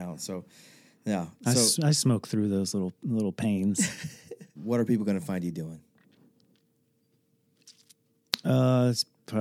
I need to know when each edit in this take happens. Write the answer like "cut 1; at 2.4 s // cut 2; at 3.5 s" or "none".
cut 1; at 4.6 s